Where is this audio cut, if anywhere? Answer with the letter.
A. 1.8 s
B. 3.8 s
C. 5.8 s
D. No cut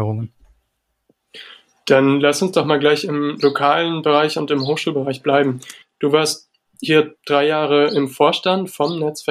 C